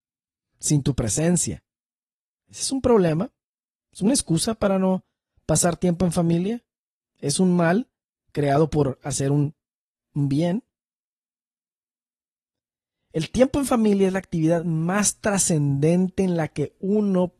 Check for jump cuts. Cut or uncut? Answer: uncut